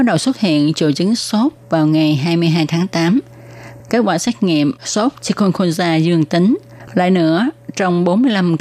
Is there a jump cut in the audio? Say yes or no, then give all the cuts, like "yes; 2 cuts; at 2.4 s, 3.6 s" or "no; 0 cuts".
yes; 2 cuts; at 3.8 s, 6.9 s